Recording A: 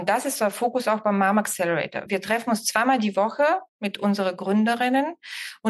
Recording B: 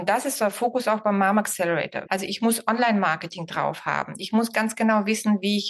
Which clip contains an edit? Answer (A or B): B